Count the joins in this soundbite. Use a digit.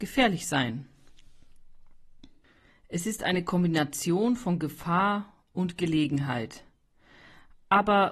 1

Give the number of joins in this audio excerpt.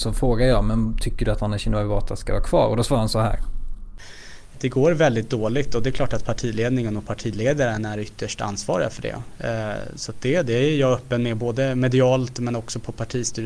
1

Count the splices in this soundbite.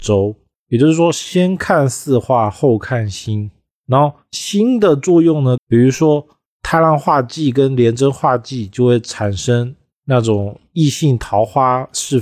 1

